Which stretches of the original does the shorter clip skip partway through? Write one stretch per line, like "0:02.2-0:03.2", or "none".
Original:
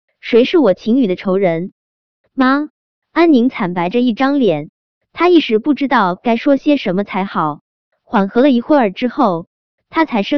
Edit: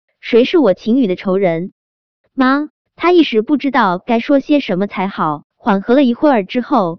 0:02.9-0:05.0
0:07.7-0:08.0